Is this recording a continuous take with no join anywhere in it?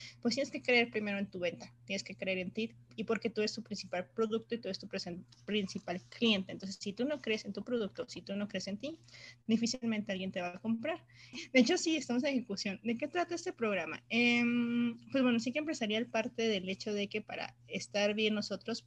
no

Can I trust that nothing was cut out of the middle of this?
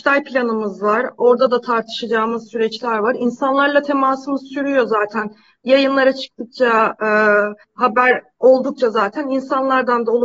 no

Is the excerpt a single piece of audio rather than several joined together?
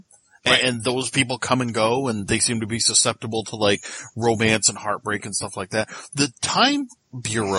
yes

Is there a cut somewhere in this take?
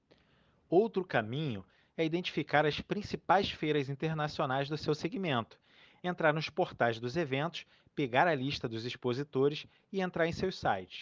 no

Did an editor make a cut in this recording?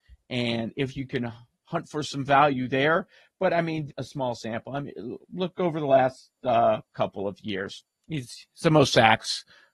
yes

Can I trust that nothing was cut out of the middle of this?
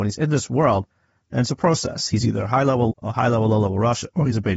no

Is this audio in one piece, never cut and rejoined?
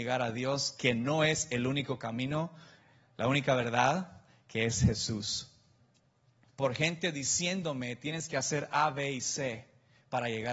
no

